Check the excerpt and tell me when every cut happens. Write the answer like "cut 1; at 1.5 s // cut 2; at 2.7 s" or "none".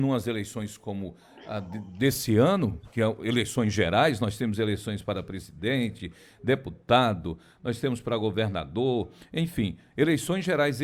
none